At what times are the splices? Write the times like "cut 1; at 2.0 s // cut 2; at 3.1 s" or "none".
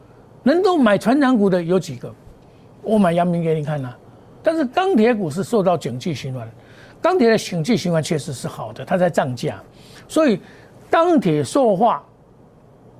cut 1; at 4.4 s